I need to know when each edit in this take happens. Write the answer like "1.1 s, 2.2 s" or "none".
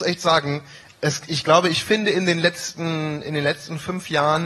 1.3 s